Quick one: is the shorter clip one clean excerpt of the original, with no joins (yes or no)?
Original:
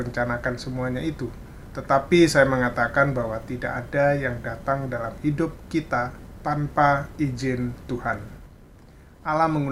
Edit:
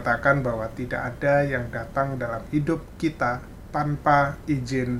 yes